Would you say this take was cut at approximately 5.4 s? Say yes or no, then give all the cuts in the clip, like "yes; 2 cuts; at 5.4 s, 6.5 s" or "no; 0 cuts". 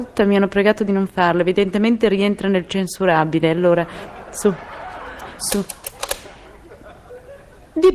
yes; 1 cut; at 5.4 s